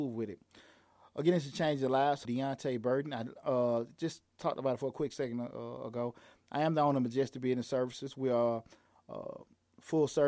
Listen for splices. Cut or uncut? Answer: cut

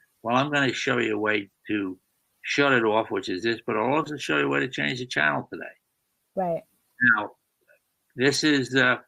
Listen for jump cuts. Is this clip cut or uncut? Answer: uncut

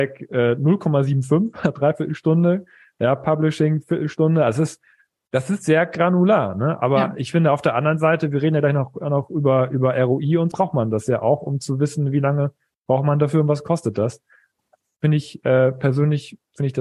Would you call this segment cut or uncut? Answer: cut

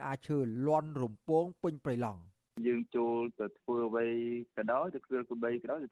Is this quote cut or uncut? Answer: uncut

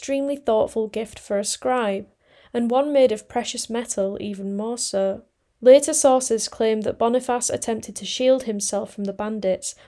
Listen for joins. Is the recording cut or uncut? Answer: cut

